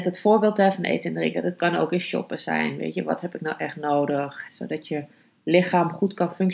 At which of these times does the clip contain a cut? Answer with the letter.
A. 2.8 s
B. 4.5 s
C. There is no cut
B